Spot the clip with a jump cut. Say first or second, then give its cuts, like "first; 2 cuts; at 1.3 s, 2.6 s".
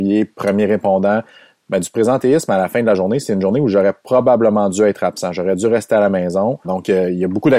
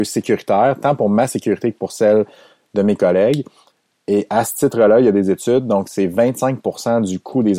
first; 1 cut; at 6.6 s